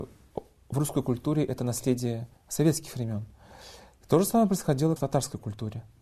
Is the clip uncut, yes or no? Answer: no